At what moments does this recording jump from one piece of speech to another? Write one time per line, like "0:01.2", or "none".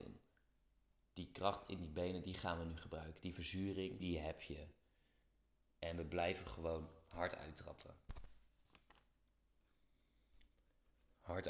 0:04.0